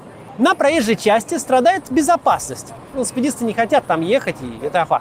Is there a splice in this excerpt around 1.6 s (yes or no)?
no